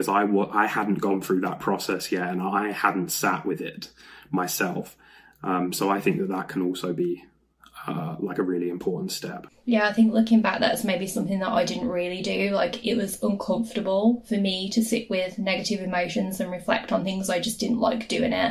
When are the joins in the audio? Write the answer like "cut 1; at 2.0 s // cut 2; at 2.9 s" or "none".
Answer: none